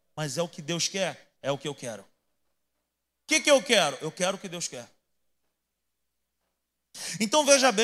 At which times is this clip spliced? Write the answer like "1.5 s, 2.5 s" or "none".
none